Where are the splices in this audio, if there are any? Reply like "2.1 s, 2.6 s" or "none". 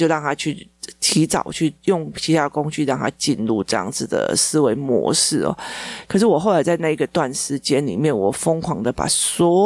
6.1 s